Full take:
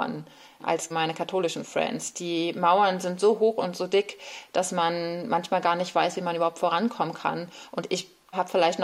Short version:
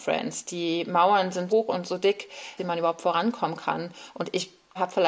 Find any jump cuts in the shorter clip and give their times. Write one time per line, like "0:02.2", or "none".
0:01.5
0:02.6